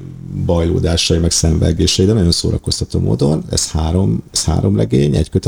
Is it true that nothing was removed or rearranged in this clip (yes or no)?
no